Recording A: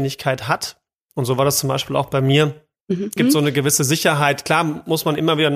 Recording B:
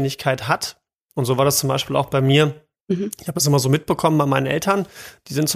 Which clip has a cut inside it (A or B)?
A